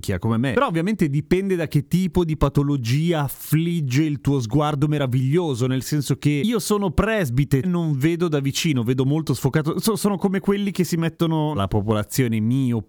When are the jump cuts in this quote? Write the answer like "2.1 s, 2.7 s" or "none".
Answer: 7.6 s, 11.5 s